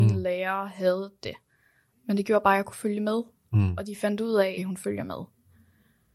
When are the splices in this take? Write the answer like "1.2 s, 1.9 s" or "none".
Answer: 4.6 s